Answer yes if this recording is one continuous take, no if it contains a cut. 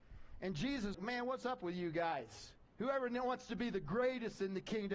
no